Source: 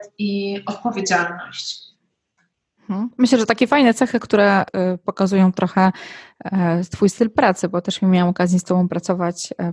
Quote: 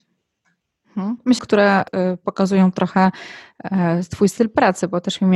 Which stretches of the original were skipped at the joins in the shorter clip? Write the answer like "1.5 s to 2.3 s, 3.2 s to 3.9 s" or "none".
3.3 s to 4.2 s